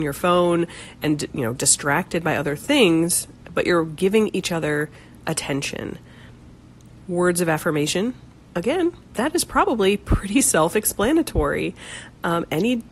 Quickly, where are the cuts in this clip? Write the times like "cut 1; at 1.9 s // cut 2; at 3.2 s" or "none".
none